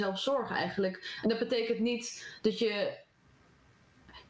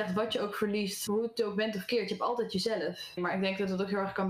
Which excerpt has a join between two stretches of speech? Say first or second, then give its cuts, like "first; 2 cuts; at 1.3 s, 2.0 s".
second; 2 cuts; at 1.1 s, 3.2 s